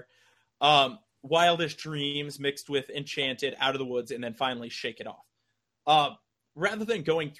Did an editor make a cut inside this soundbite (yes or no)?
no